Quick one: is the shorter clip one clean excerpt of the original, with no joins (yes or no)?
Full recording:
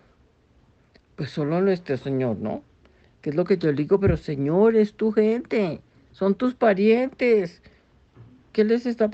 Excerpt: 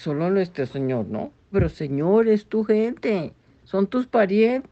no